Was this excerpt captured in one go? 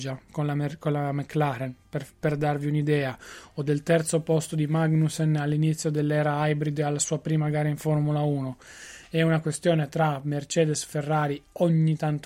yes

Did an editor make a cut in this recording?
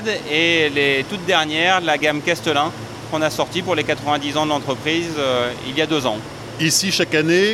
no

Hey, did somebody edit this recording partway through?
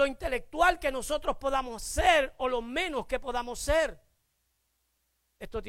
no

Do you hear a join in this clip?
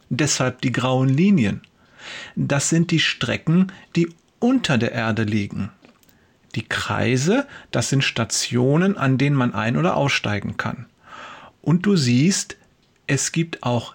no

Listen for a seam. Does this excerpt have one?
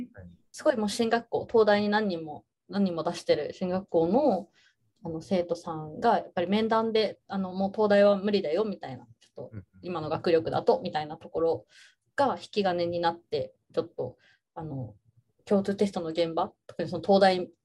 no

